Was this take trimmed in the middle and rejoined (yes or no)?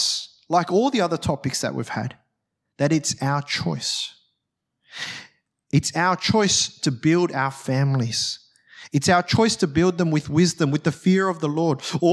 no